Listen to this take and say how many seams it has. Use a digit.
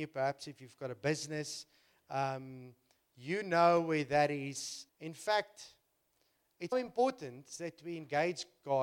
2